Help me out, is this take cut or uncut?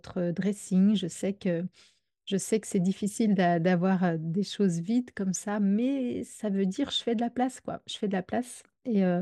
uncut